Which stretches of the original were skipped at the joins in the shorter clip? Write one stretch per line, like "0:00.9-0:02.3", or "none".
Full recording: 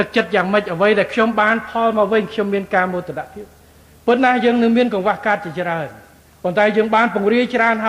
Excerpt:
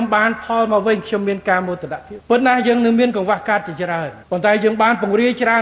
0:03.4-0:04.0
0:06.0-0:06.4